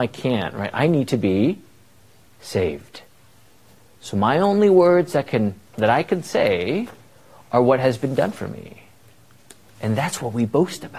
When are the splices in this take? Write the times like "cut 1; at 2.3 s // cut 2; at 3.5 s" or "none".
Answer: cut 1; at 5.7 s